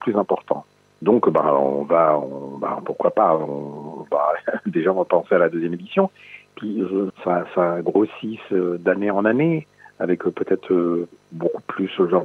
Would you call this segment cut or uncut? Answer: cut